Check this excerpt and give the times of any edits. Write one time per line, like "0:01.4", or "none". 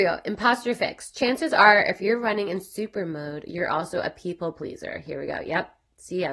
none